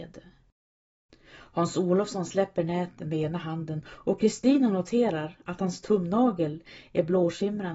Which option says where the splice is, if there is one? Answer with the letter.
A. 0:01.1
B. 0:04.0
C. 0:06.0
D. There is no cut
A